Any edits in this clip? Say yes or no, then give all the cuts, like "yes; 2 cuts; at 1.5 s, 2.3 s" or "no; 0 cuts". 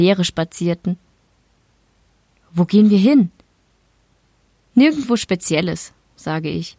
no; 0 cuts